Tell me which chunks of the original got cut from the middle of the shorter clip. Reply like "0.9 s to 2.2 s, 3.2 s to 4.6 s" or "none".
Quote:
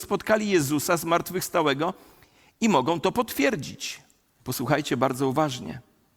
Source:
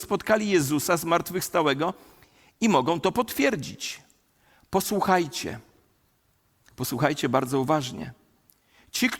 4.4 s to 6.7 s